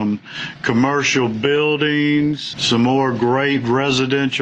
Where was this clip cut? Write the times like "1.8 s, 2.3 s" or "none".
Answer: 2.5 s